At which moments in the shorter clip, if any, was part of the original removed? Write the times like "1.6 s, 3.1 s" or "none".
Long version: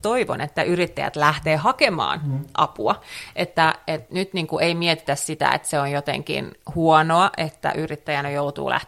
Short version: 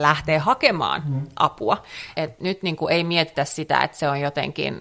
2.1 s